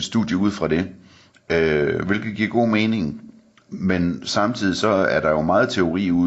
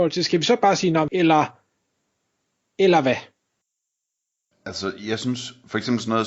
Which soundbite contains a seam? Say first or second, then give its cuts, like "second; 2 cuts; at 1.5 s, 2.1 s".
second; 1 cut; at 1.1 s